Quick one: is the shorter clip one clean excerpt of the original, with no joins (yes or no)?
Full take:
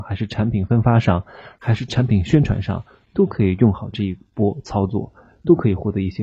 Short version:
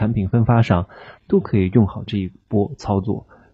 no